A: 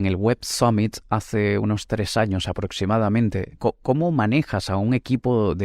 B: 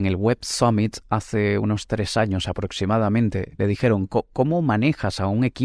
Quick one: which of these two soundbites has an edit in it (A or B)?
A